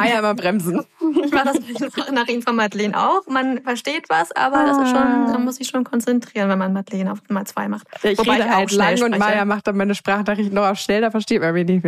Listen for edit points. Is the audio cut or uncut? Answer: uncut